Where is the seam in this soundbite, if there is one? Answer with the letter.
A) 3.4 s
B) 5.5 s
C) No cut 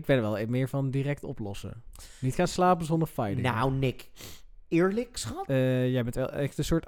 B